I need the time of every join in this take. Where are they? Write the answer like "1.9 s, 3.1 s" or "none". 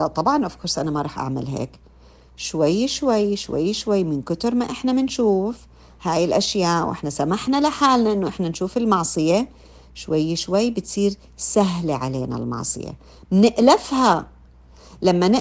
none